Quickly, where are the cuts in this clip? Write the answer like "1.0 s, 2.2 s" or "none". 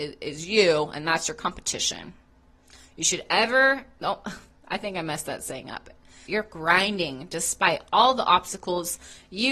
6.3 s